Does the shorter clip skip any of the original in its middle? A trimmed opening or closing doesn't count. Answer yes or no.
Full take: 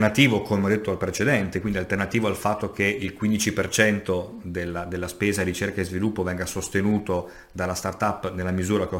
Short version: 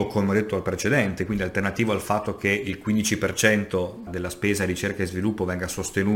yes